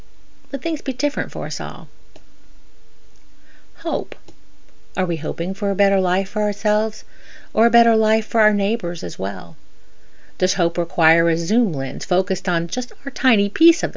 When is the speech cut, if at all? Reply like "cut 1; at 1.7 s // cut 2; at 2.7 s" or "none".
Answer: none